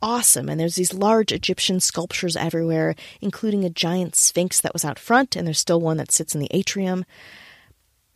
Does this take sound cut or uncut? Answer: uncut